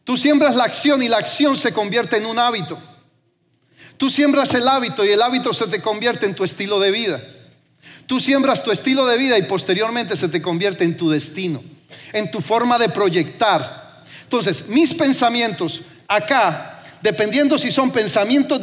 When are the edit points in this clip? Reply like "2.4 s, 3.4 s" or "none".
none